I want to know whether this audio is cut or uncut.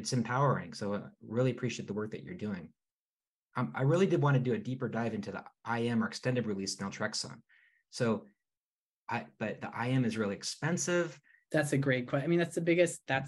cut